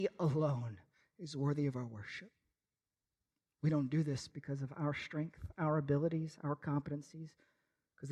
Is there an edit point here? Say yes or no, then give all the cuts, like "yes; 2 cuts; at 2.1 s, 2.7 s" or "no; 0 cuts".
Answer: no; 0 cuts